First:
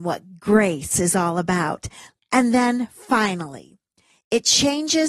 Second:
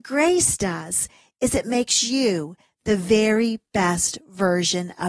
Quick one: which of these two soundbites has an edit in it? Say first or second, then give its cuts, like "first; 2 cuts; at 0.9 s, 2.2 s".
first; 1 cut; at 2.2 s